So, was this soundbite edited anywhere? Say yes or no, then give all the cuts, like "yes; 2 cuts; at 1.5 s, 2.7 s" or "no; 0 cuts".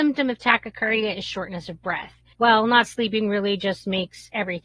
yes; 1 cut; at 2.3 s